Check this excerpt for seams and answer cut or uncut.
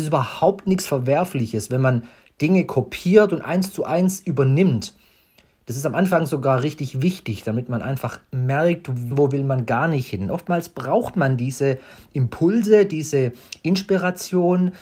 cut